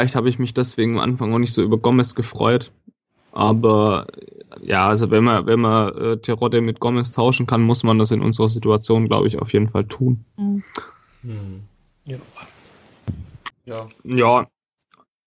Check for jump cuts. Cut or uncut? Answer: cut